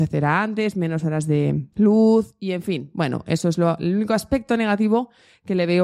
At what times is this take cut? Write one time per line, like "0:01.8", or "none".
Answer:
0:01.7